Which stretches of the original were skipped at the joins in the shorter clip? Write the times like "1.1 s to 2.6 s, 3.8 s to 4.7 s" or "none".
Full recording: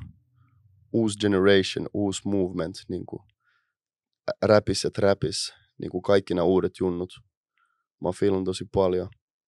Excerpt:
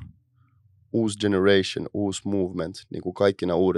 2.8 s to 5.7 s